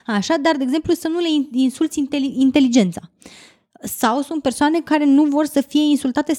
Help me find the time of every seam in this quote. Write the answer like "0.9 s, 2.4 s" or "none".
none